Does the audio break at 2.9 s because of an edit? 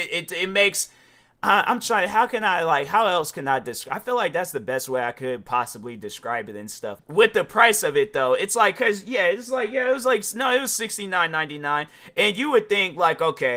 no; 1 cut; at 7.0 s

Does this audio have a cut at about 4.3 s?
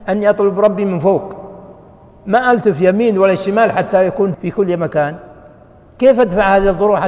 yes; 1 cut; at 4.3 s

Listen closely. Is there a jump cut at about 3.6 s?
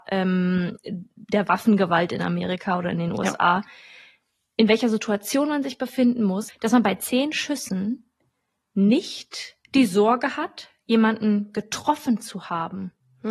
no; 1 cut; at 9.6 s

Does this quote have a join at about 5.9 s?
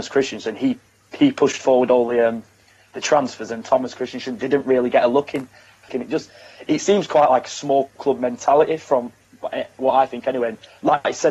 yes; 1 cut; at 5.9 s

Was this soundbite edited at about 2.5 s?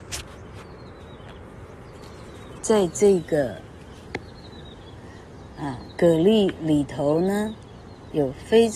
yes; 1 cut; at 2.5 s

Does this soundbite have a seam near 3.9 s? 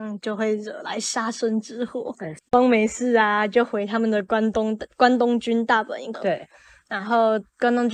no; 2 cuts; at 2.4 s, 6.1 s

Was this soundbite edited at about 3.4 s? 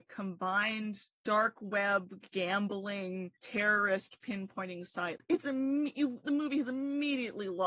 yes; 2 cuts; at 3.4 s, 5.2 s

